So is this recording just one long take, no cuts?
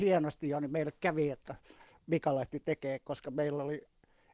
yes; 0 cuts

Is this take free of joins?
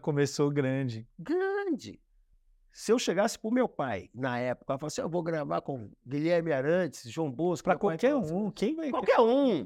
yes; 0 cuts

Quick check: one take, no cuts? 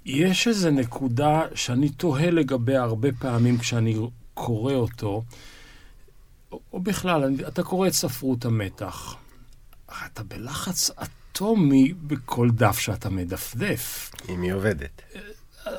yes; 0 cuts

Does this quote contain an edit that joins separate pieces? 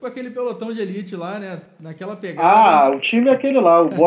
no; 0 cuts

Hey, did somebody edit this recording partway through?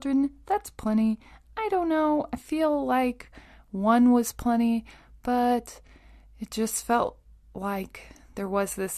no; 0 cuts

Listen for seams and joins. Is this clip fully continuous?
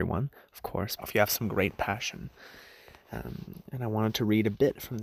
no; 1 cut; at 1.0 s

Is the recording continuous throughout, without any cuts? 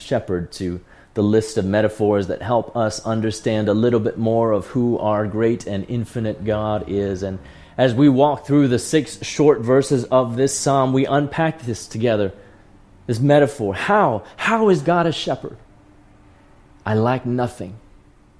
yes; 0 cuts

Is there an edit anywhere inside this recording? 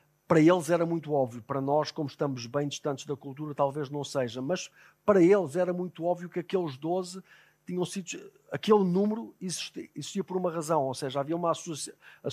no; 0 cuts

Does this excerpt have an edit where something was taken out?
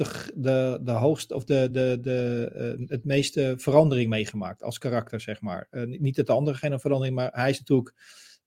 no; 0 cuts

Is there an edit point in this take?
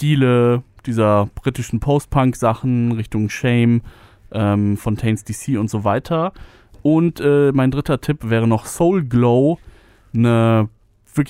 no; 0 cuts

